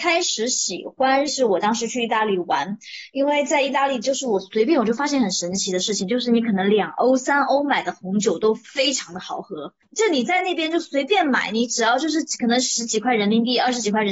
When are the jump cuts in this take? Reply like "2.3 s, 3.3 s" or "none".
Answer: 1.3 s